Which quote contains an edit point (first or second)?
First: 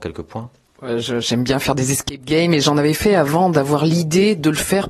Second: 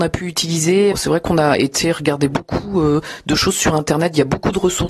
second